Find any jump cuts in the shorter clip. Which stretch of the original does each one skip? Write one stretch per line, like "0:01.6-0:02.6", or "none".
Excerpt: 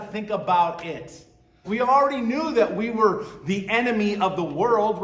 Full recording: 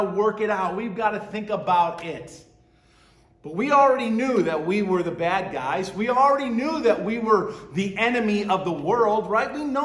0:02.8-0:05.9